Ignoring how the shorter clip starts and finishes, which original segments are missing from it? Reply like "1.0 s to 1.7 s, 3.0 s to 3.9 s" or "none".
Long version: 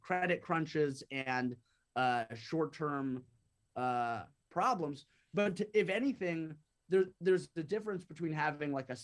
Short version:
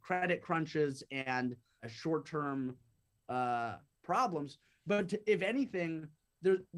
1.8 s to 2.3 s